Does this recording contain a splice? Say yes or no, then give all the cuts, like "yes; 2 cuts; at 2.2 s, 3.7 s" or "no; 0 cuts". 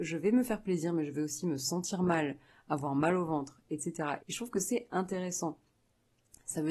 yes; 1 cut; at 4.2 s